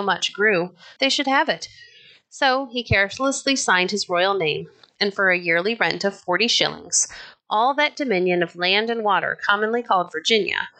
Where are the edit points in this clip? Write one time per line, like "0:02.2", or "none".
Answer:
0:01.0